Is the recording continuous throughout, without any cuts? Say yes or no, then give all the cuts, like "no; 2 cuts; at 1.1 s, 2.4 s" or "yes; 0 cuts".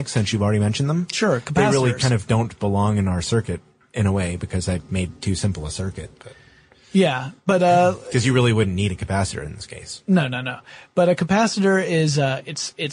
yes; 0 cuts